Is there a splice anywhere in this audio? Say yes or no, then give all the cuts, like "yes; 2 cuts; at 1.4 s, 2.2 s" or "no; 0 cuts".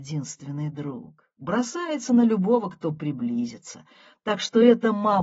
no; 0 cuts